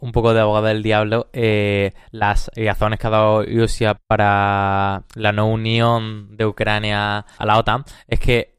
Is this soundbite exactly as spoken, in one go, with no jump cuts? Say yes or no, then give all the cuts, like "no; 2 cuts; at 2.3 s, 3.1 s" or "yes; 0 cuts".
no; 2 cuts; at 4.0 s, 7.4 s